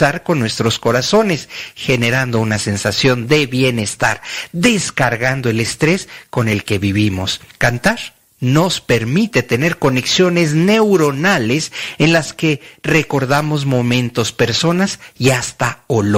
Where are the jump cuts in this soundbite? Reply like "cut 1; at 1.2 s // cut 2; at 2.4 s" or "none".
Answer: none